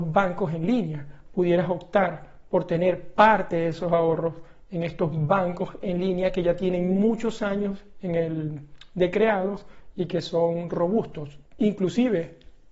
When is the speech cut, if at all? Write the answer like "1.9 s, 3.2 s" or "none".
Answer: 11.4 s